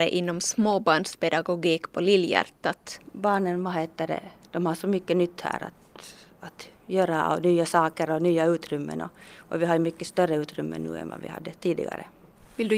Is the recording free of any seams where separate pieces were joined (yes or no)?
yes